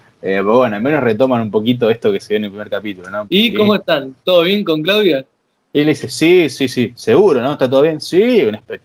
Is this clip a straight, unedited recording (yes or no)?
no